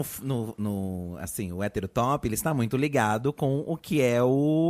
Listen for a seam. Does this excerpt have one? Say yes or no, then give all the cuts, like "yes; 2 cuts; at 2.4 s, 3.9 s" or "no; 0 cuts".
no; 0 cuts